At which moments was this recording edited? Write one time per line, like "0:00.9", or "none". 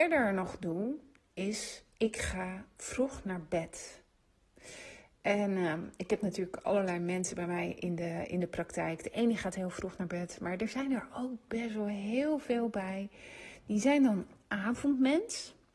none